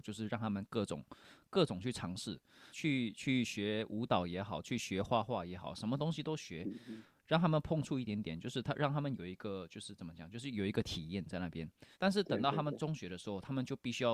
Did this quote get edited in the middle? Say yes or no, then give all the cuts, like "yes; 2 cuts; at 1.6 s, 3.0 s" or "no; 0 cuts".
yes; 2 cuts; at 2.7 s, 11.9 s